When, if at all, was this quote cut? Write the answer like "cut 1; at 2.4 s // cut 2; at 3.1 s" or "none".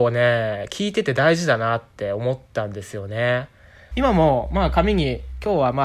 cut 1; at 3.9 s